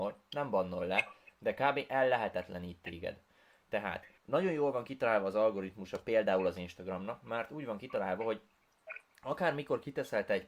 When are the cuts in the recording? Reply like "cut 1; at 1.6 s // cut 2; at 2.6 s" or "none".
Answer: cut 1; at 4.2 s